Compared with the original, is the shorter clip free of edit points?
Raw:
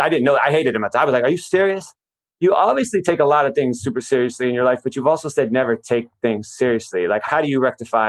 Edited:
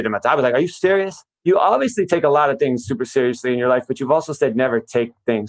no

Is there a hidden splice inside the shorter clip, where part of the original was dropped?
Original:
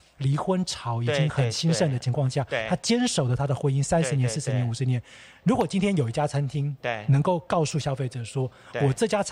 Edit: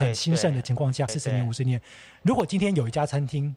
yes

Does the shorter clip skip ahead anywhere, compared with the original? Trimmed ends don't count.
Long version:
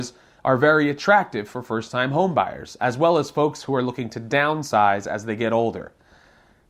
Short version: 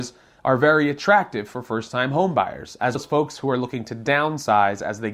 yes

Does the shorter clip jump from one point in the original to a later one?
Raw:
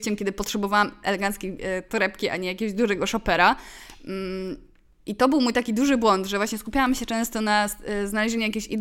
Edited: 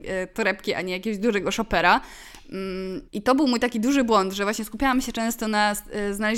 yes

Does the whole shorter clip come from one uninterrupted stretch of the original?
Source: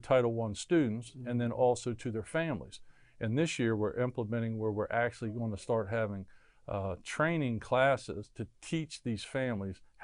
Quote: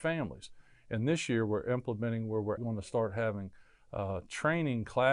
no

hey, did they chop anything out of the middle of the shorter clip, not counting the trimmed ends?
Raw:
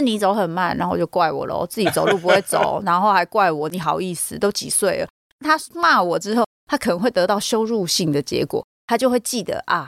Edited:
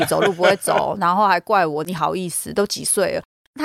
no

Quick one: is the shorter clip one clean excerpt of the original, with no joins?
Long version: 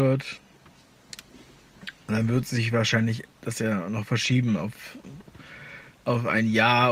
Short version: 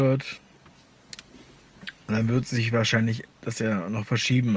yes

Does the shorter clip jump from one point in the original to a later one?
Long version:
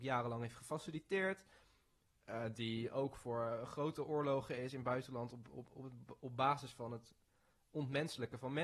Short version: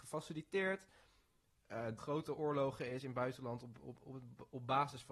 yes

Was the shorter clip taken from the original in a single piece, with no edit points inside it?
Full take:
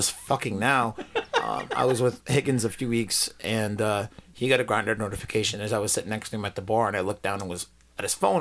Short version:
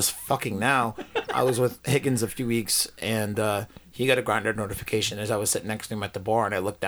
no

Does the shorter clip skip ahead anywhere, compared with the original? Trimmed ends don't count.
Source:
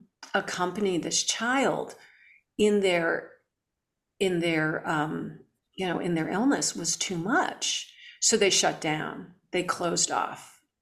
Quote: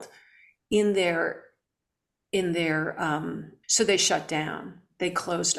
yes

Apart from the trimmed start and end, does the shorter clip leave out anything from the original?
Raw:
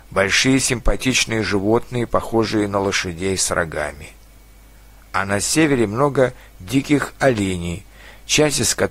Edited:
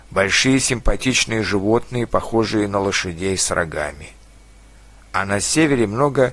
no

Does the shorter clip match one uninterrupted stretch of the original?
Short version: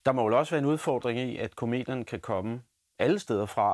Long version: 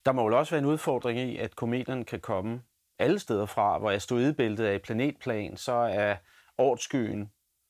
yes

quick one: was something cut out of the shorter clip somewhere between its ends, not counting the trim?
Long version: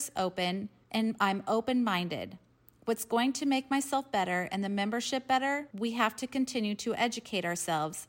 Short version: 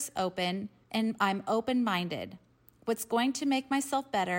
no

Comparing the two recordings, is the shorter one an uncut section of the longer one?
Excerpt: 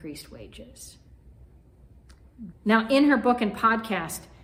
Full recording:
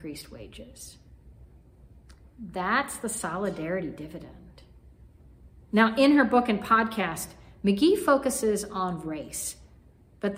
no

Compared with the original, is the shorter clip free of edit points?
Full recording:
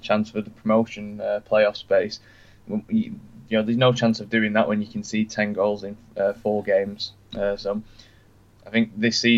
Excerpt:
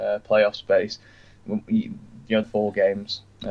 no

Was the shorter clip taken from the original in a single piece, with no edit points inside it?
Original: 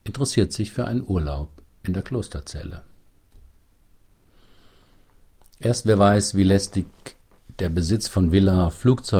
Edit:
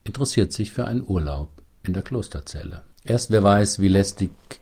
no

